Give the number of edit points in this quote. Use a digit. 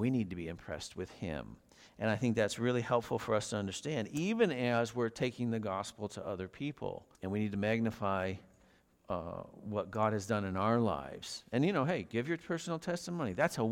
1